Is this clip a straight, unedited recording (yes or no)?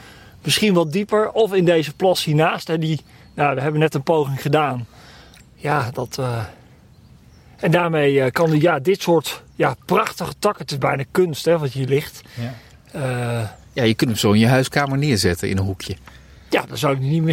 no